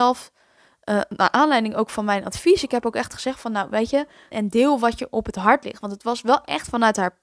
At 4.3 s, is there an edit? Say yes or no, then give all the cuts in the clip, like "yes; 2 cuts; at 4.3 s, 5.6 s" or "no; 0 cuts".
yes; 1 cut; at 4.3 s